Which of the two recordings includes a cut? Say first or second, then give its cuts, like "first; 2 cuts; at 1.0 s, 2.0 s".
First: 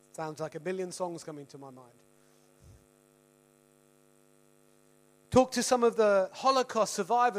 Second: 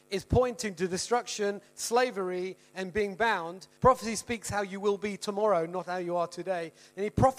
second; 1 cut; at 3.8 s